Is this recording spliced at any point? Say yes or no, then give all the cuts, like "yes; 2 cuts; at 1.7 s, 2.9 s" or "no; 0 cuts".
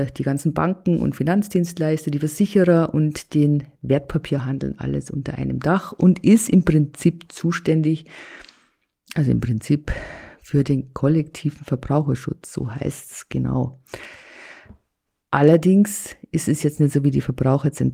no; 0 cuts